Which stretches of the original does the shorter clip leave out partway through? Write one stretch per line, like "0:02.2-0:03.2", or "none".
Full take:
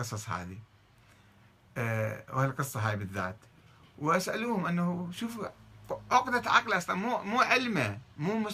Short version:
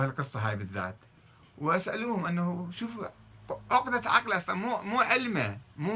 none